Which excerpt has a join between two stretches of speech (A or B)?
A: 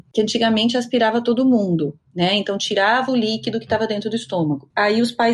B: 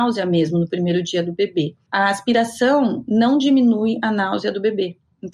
A